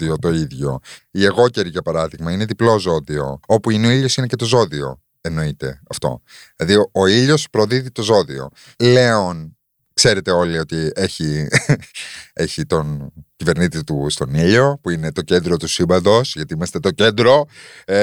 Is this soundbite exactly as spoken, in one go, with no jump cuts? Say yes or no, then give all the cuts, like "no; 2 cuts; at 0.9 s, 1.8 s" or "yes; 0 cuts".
no; 2 cuts; at 1.0 s, 3.4 s